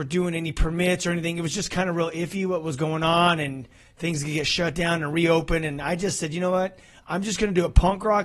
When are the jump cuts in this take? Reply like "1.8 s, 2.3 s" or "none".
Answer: none

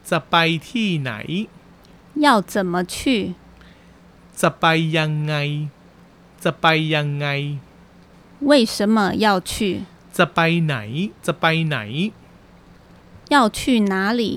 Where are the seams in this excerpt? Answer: 10.0 s, 11.2 s

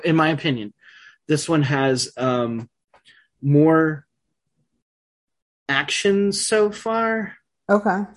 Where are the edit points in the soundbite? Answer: none

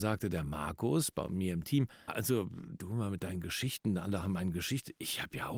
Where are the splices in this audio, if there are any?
2.1 s

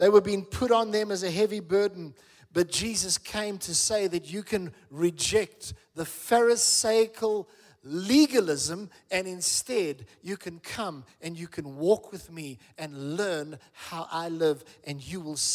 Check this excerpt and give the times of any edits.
none

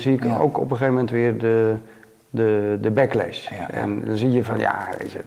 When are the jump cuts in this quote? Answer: none

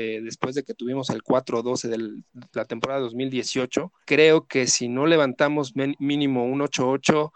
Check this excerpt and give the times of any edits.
4.0 s

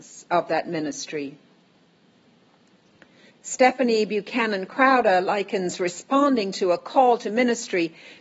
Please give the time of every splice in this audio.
3.3 s

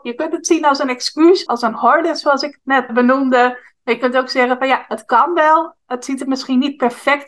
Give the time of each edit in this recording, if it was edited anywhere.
1.5 s, 2.9 s

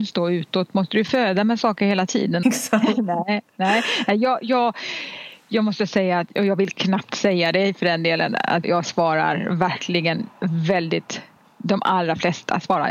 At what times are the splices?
2.4 s, 8.6 s

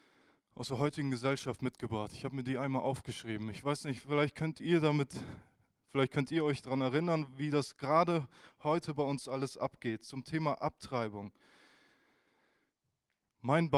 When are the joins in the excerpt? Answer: none

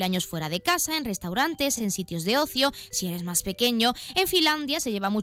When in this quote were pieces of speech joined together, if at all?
none

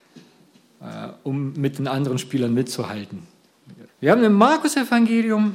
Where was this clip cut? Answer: 3.9 s

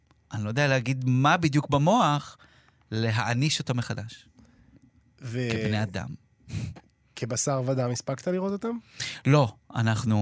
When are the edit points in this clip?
none

